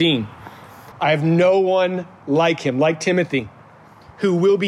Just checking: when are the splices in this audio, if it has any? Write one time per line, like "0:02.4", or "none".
0:00.9